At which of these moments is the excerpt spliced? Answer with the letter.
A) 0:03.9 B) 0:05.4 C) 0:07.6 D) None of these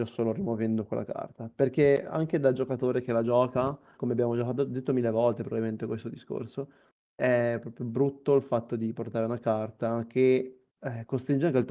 A